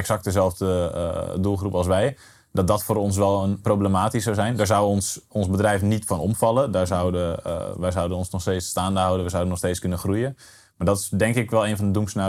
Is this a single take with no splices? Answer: yes; 0 cuts

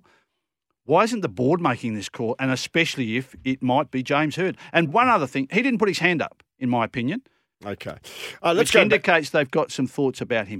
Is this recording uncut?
no; 1 cut; at 7.5 s

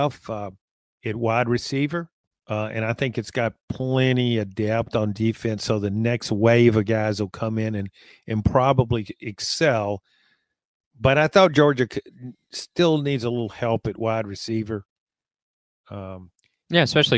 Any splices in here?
yes; 1 cut; at 2.3 s

